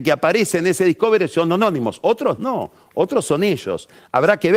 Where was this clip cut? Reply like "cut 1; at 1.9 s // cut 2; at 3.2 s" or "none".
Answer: none